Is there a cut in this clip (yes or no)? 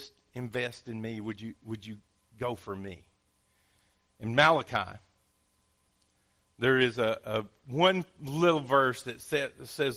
no